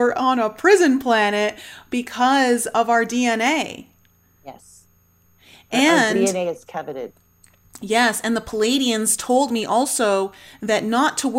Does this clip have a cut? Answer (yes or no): no